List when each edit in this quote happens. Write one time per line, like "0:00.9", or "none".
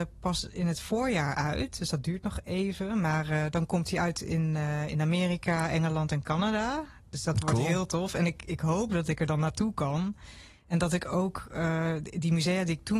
none

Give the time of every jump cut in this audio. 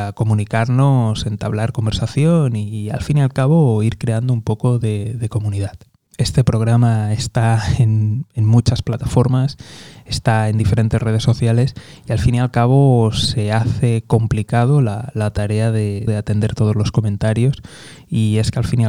0:16.1

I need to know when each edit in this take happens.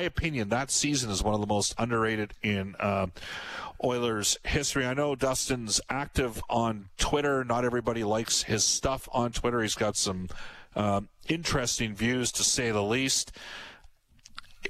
none

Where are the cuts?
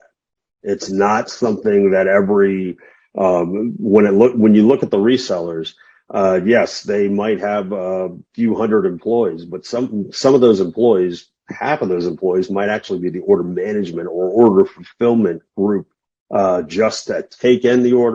none

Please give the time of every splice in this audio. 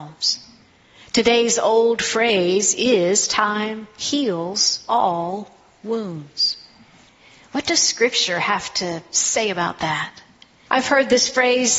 0:10.7

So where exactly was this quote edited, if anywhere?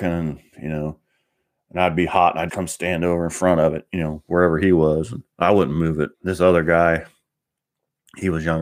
0:02.5
0:06.1

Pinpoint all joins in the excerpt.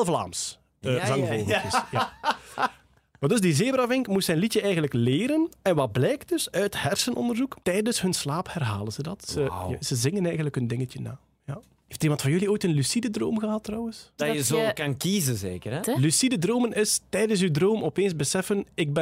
0:07.6
0:14.2
0:15.8

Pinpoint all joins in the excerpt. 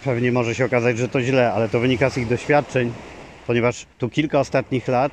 0:03.9

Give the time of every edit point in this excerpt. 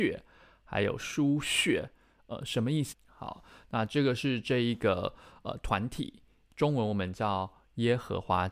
0:02.9

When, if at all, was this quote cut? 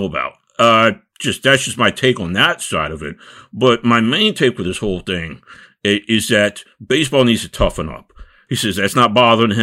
0:08.5

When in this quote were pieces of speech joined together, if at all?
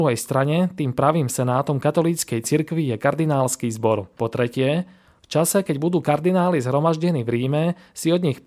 0:04.2

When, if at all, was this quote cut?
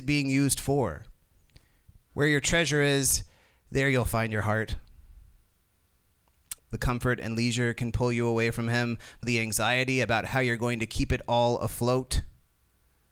0:06.6
0:09.2

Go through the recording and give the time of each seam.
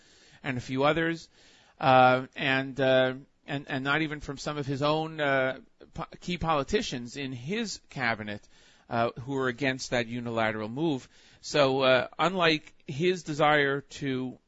none

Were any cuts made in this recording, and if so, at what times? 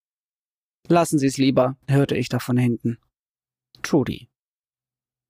0:01.8
0:03.7

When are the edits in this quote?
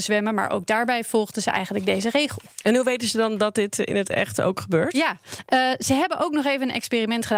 none

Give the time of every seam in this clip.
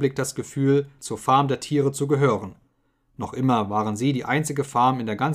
0:01.0

